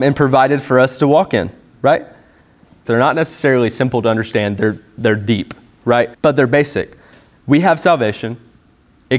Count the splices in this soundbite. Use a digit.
2